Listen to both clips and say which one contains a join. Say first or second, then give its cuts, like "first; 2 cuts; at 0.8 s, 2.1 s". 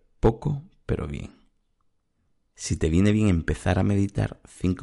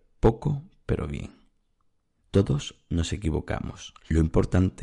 second; 1 cut; at 2.2 s